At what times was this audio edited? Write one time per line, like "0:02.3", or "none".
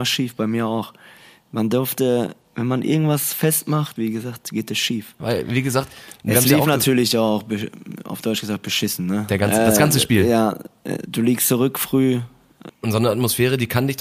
0:04.0
0:05.2
0:12.7